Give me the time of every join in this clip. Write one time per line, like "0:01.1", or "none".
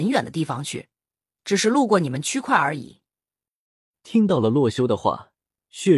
0:03.8